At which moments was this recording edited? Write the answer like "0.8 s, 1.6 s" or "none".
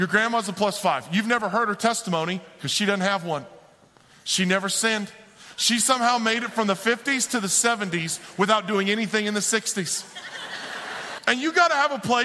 11.2 s